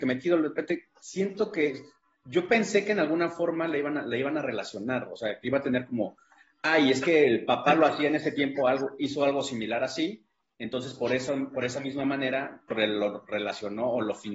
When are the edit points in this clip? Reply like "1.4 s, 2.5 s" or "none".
12.7 s

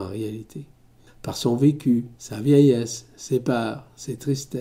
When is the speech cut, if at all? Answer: 1.1 s, 2.1 s

